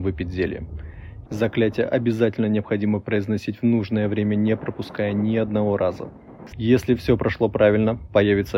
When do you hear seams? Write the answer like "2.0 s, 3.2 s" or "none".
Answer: 1.2 s, 6.5 s